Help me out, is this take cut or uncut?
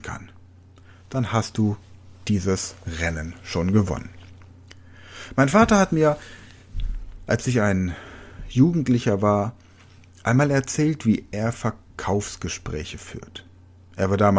uncut